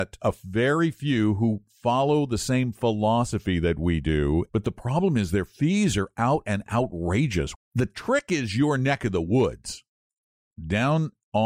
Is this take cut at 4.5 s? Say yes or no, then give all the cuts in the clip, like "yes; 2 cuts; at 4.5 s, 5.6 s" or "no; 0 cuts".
yes; 2 cuts; at 4.5 s, 7.5 s